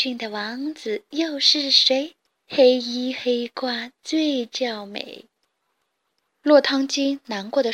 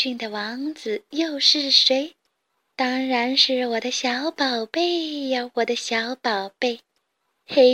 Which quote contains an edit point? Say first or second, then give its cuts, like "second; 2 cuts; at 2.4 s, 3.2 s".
first; 2 cuts; at 2.4 s, 6.2 s